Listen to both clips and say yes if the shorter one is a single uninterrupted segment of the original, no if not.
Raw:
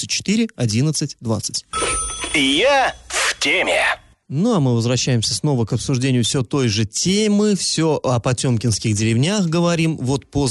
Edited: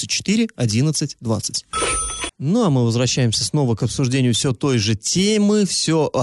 no